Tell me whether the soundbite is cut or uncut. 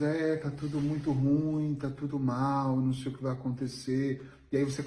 cut